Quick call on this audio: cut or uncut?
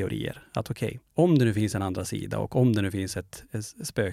cut